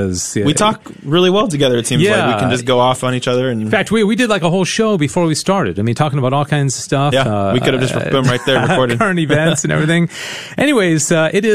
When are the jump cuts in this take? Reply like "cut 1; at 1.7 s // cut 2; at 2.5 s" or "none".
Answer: none

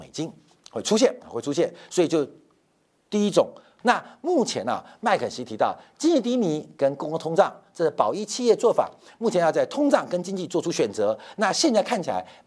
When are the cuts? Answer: cut 1; at 3.8 s

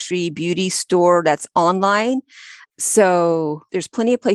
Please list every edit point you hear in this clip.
cut 1; at 2.6 s

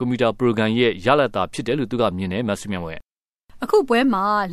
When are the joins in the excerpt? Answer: none

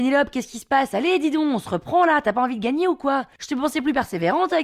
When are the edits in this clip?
none

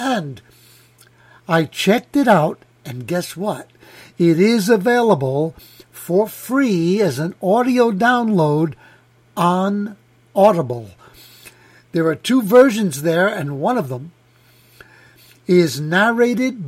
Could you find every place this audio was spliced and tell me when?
none

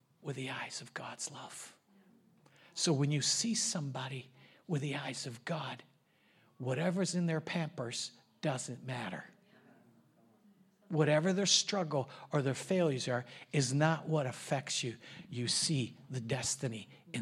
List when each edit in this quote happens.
none

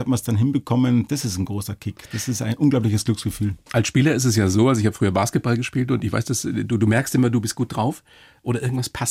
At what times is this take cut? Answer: none

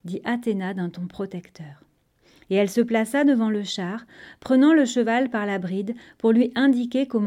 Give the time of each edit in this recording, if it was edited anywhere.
none

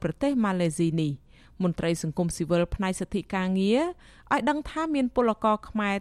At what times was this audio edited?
none

